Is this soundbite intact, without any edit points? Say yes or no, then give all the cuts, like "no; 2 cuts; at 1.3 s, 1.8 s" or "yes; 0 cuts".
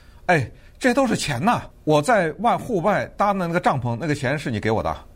no; 1 cut; at 1.7 s